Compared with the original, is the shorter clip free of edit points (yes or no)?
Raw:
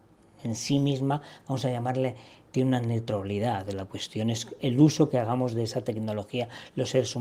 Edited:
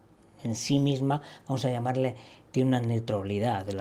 yes